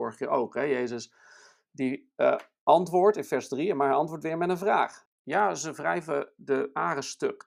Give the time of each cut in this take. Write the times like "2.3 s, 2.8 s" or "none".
5.1 s